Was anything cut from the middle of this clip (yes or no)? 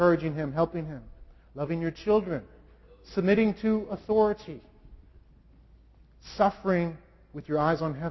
no